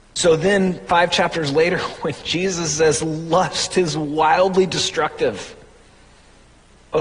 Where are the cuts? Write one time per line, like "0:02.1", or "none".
none